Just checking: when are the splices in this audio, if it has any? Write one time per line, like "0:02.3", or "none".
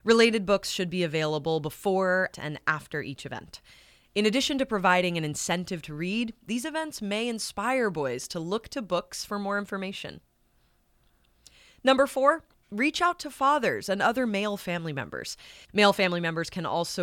0:02.3
0:15.7

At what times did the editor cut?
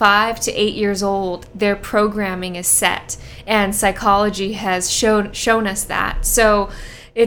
none

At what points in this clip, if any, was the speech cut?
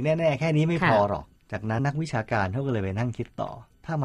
0:01.8

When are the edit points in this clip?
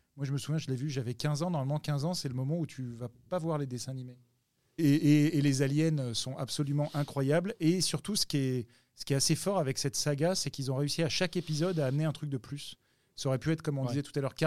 0:04.8

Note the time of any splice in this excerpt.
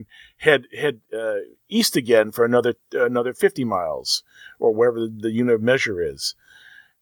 none

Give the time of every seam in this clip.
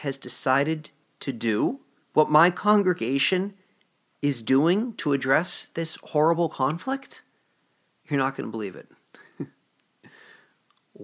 none

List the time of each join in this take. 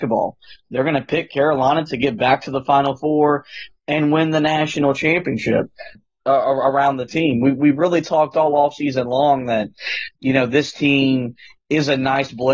0:06.0

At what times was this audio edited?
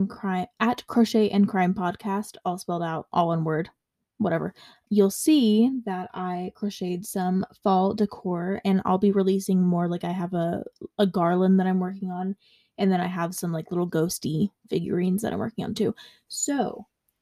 0:04.9

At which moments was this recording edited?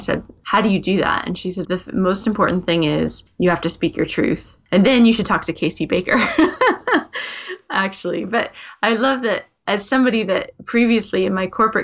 0:01.6

